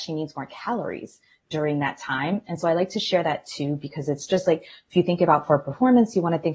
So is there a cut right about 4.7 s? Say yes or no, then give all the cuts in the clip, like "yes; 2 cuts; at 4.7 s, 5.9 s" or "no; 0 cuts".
no; 0 cuts